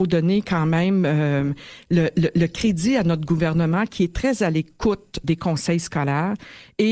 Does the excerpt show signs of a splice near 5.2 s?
yes; 1 cut; at 5.2 s

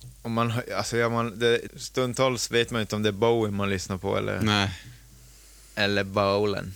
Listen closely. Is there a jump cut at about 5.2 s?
no; 1 cut; at 1.7 s

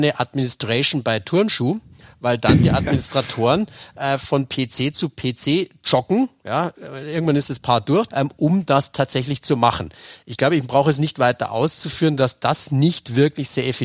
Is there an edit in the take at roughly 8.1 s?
yes; 1 cut; at 8.1 s

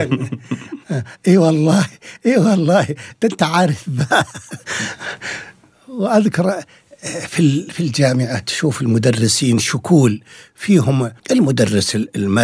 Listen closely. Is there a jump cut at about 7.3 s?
no; 1 cut; at 11.2 s

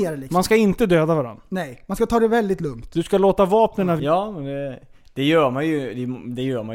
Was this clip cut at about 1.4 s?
no; 1 cut; at 4.0 s

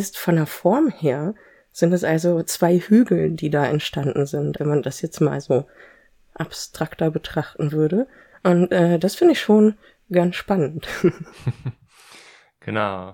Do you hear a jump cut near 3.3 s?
no; 1 cut; at 4.6 s

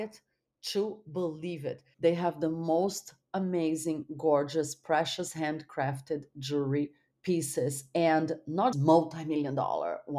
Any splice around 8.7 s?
yes; 2 cuts; at 1.9 s, 8.7 s

